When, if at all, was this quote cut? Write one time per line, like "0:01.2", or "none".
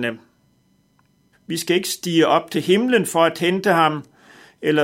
0:01.3